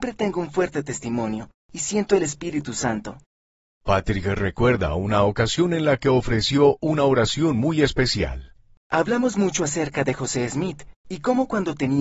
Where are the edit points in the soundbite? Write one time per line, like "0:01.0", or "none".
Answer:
none